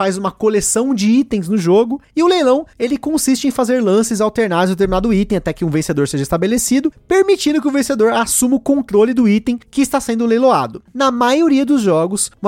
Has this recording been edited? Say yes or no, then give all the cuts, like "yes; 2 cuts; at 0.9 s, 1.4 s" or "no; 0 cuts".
no; 0 cuts